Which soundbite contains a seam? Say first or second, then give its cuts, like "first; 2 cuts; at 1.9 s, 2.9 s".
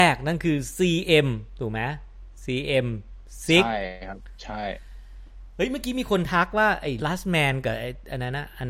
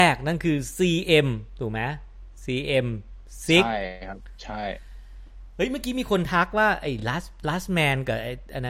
first; 1 cut; at 7.0 s